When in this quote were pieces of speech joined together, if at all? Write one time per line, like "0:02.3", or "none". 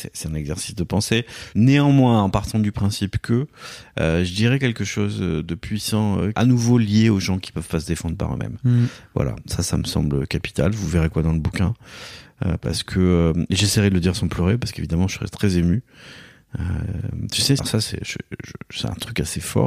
0:01.5
0:06.3
0:17.6